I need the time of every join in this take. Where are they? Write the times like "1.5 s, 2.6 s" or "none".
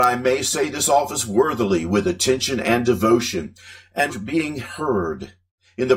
4.1 s